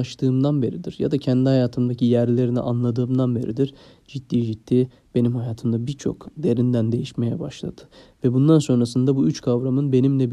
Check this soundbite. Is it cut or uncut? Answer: uncut